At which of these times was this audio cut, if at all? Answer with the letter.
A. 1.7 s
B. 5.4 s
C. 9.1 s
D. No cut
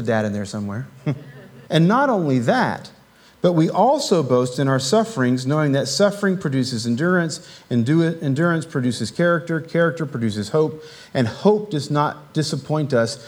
A